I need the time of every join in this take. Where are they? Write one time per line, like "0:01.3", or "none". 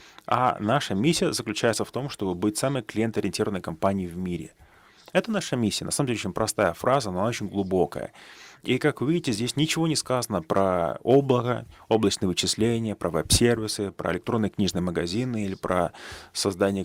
none